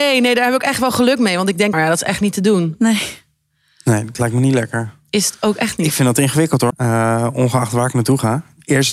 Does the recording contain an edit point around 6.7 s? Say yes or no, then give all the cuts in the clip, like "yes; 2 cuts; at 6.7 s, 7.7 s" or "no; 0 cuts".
yes; 2 cuts; at 1.7 s, 6.7 s